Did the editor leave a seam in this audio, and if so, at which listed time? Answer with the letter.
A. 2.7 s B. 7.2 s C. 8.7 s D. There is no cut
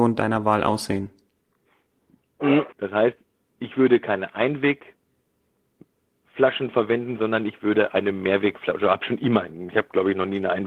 A